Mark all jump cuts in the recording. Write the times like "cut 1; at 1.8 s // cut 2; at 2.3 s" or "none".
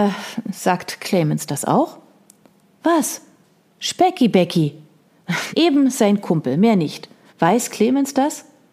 cut 1; at 5.5 s // cut 2; at 7.3 s